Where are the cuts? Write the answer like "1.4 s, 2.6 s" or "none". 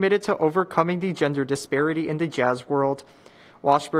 none